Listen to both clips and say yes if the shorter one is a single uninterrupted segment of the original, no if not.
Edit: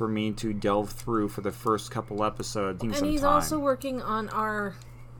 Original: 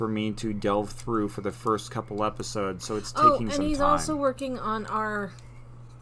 no